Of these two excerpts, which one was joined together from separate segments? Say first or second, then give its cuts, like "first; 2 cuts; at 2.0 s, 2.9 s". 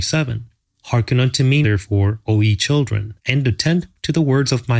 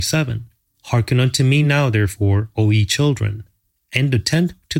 first; 2 cuts; at 1.6 s, 3.2 s